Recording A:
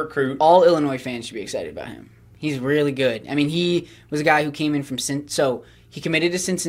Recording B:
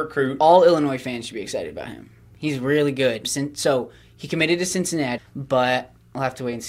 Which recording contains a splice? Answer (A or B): B